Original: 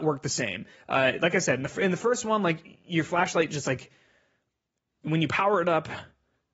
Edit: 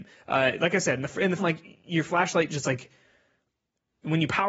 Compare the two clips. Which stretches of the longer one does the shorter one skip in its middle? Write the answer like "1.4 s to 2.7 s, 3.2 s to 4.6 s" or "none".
2.0 s to 2.4 s